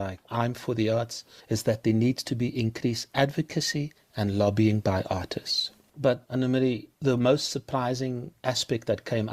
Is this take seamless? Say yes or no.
yes